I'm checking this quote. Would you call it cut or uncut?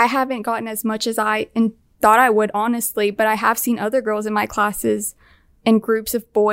uncut